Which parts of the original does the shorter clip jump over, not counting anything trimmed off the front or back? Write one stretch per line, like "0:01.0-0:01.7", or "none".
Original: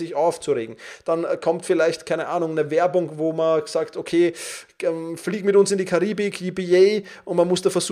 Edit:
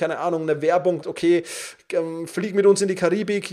0:03.1-0:03.9